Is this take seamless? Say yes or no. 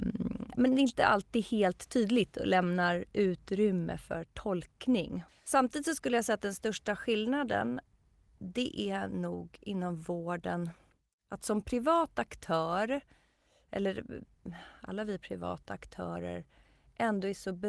no